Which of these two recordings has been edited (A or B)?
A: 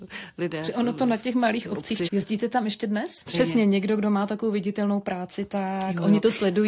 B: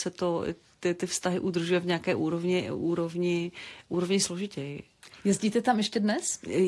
A